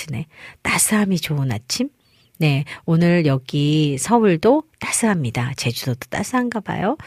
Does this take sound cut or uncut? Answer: uncut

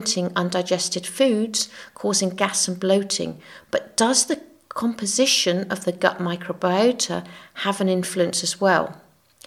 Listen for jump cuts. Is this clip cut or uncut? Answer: uncut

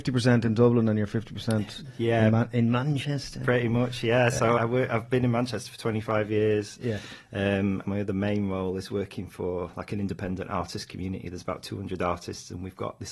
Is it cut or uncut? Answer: cut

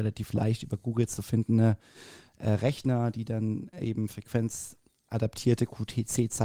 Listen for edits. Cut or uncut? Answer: uncut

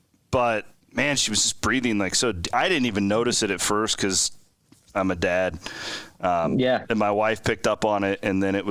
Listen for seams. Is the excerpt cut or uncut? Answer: uncut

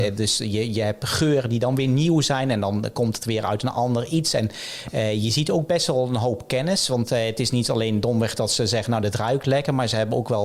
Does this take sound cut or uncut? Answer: uncut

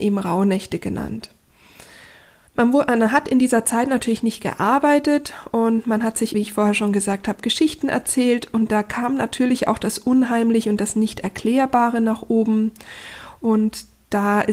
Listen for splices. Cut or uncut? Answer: cut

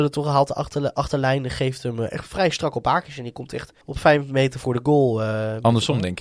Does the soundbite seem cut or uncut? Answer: cut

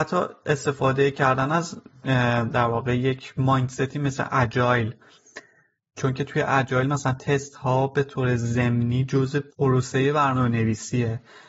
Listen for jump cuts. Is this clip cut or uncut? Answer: cut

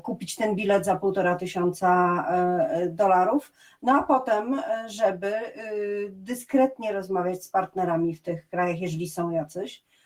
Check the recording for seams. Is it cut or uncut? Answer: uncut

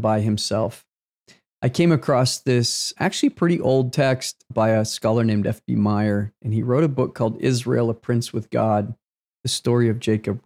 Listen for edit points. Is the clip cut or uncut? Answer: uncut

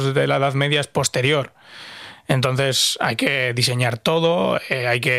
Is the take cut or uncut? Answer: uncut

